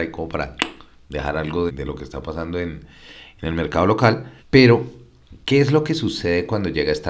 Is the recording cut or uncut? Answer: cut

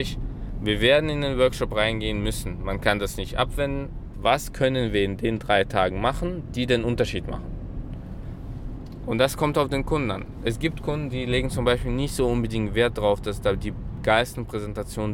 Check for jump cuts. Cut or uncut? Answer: cut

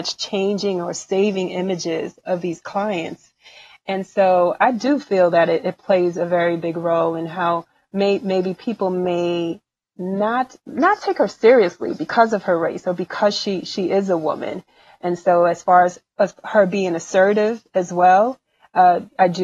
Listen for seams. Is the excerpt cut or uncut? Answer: cut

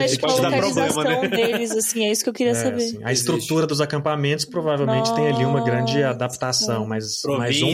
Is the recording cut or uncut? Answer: uncut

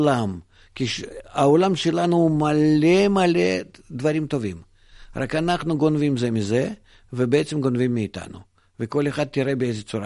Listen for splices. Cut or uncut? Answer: uncut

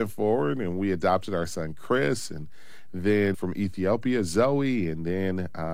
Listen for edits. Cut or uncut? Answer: cut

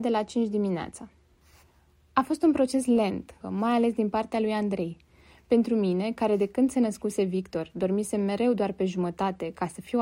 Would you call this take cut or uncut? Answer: cut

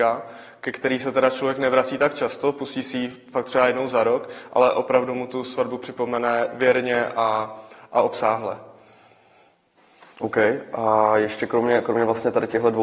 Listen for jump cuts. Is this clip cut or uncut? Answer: uncut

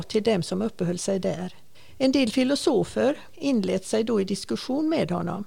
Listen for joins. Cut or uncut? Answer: cut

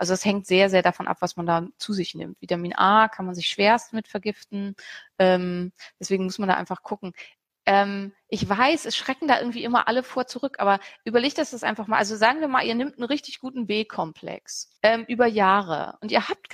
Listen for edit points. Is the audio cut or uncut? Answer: cut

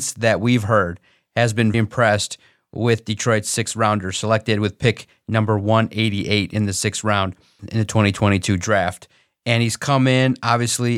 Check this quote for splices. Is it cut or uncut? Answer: cut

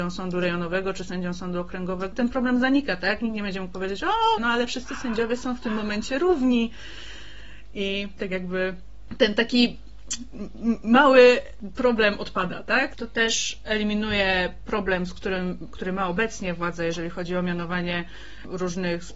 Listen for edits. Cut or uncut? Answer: cut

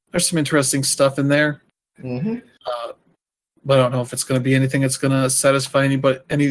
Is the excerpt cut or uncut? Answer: uncut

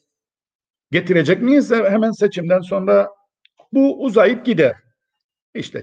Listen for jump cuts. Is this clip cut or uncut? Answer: uncut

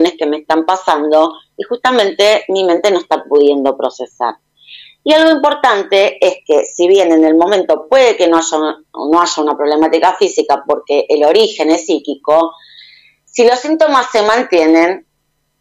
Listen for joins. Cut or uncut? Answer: uncut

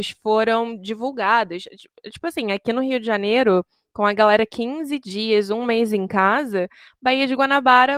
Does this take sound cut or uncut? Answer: uncut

